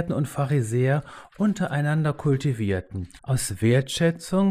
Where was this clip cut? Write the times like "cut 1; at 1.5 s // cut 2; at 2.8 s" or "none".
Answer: cut 1; at 3.2 s